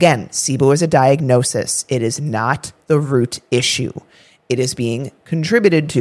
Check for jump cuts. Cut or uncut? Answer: uncut